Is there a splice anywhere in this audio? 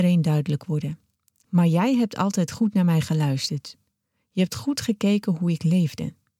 yes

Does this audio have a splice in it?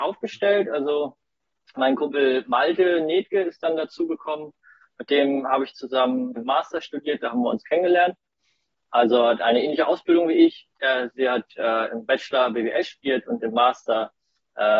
yes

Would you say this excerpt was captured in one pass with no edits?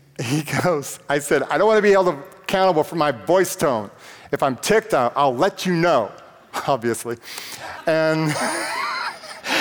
yes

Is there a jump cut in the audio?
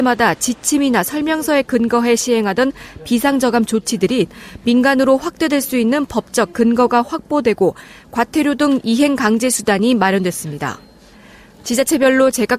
no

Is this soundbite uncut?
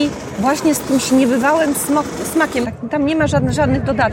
no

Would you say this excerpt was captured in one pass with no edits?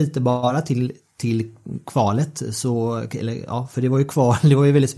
yes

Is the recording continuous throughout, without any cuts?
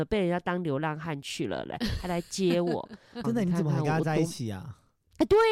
no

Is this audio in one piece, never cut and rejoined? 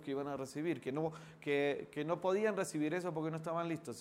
yes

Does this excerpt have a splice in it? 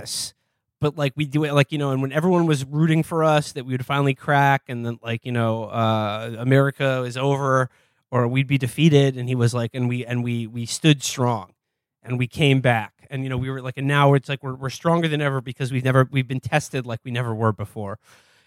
no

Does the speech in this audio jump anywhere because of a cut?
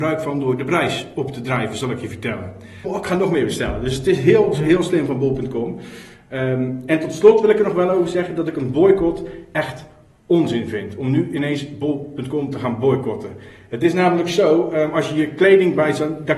yes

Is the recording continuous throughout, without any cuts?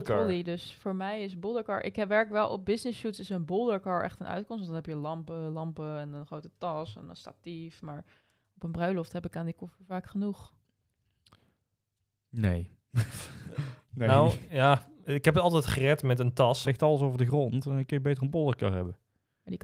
no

